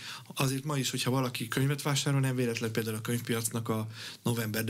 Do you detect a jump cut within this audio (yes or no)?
no